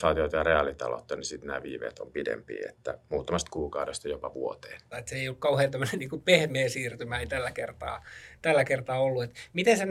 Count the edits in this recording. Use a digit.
1